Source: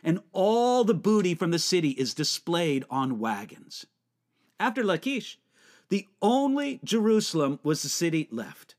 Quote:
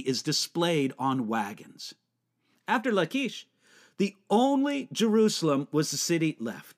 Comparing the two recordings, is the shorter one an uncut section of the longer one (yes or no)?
yes